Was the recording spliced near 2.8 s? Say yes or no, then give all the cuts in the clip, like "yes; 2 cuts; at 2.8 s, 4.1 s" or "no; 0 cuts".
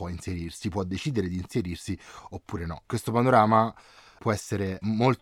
no; 0 cuts